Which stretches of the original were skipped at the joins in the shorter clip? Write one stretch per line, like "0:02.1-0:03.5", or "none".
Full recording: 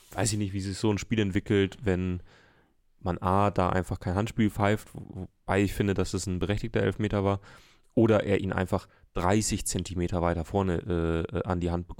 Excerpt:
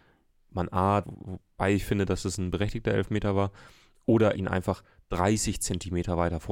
0:03.5-0:04.9
0:08.2-0:08.4

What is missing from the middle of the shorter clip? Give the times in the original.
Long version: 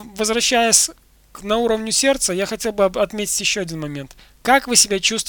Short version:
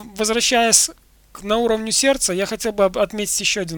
none

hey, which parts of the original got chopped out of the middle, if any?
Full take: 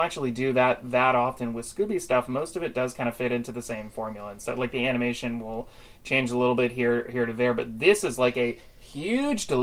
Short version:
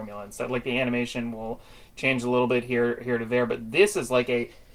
none

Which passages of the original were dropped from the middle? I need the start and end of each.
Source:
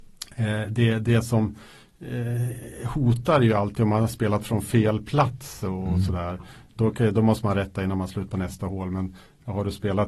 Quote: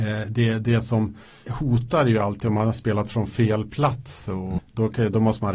0:01.9-0:02.8
0:05.9-0:06.6

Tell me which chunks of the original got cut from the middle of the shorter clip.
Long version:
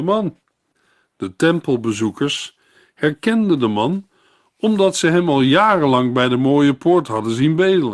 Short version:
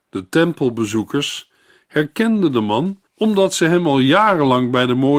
0:04.1-0:04.5

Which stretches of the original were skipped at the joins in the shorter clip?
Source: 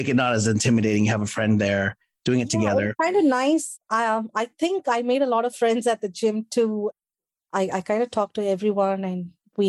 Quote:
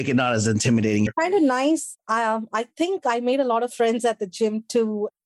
0:01.1-0:02.9

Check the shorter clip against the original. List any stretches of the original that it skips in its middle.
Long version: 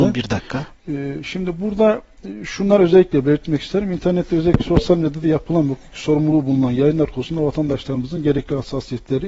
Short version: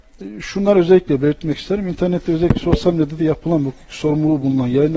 none

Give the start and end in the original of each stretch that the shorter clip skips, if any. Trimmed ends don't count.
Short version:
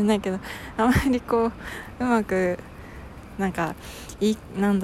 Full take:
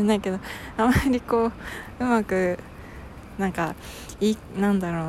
none

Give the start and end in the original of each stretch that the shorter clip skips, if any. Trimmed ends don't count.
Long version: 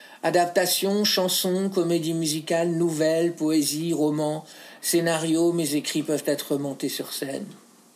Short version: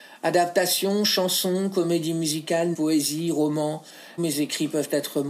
0:02.7-0:03.4
0:04.8-0:05.5

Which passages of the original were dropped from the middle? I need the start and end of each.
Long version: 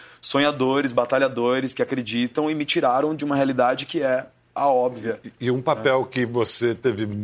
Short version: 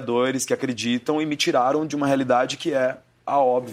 none

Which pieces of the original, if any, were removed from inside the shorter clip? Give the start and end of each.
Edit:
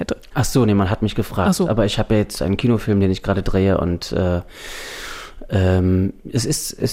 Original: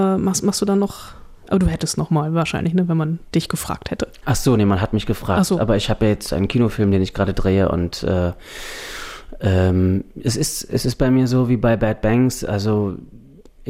none

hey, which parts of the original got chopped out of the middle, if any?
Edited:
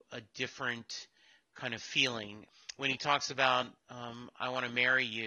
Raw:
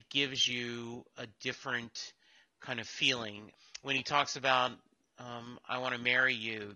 0:04.8-0:05.1

